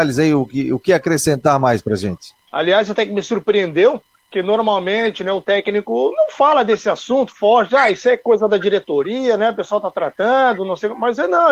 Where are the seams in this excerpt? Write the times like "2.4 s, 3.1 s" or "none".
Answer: 2.5 s

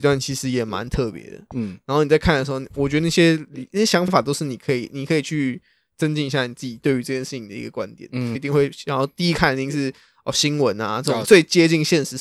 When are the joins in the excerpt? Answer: 8.3 s, 11.2 s

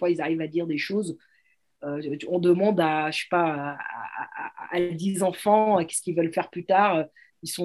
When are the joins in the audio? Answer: none

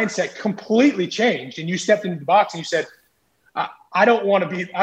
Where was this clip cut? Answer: none

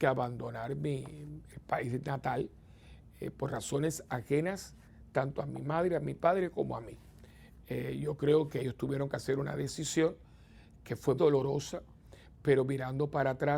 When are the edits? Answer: 11.2 s

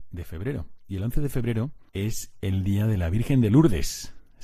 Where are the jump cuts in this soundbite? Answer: 1.9 s

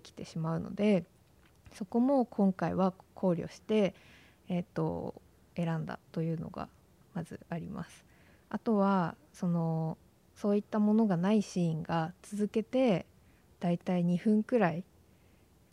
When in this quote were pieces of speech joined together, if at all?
none

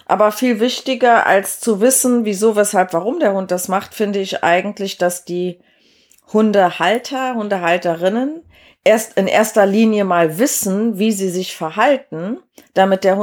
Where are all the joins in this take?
none

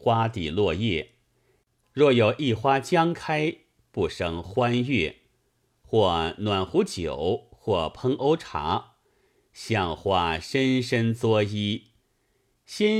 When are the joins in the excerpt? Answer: 1.8 s

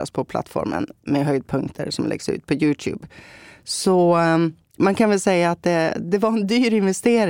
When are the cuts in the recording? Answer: none

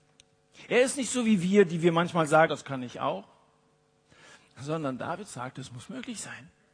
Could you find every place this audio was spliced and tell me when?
2.5 s

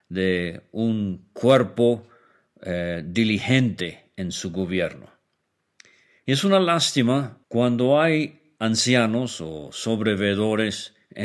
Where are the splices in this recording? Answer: 7.4 s

